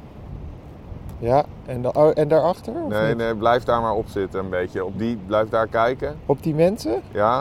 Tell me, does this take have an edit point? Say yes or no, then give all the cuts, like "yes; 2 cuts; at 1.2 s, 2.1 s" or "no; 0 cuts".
no; 0 cuts